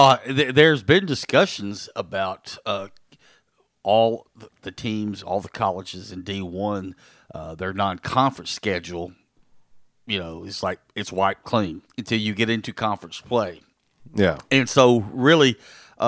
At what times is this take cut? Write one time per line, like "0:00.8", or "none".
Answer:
0:11.8